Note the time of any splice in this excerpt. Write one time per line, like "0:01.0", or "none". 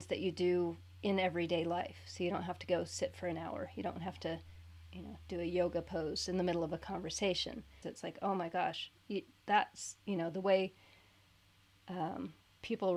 0:07.8